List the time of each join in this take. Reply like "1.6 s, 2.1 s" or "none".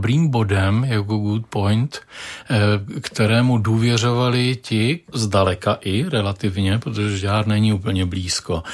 5.1 s